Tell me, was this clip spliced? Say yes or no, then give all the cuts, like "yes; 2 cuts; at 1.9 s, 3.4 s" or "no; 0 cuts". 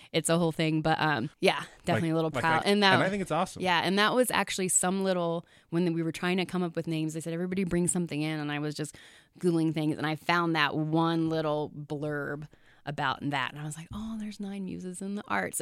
yes; 1 cut; at 2.6 s